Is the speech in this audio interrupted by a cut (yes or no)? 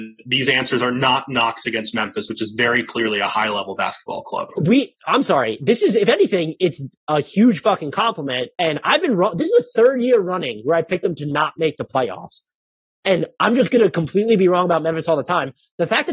no